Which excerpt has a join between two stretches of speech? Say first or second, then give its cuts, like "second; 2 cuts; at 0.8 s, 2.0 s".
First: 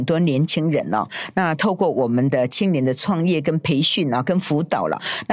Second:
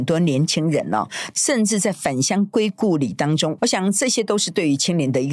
second; 2 cuts; at 1.3 s, 3.6 s